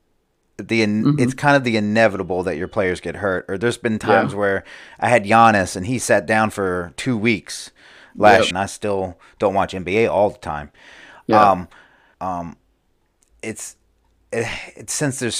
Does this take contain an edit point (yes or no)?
yes